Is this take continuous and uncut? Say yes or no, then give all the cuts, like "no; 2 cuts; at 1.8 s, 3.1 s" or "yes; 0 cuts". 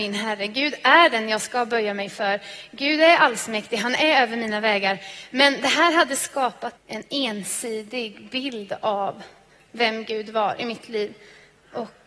no; 1 cut; at 6.8 s